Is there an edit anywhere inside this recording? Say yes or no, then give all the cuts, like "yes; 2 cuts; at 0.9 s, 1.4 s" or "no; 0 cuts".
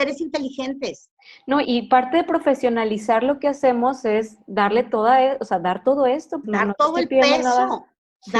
yes; 2 cuts; at 1.6 s, 6.4 s